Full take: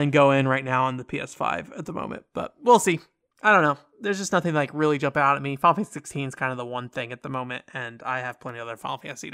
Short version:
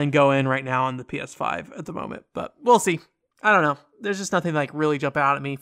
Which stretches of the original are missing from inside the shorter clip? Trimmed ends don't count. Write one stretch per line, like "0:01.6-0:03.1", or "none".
none